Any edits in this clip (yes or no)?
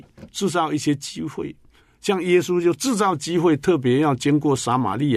no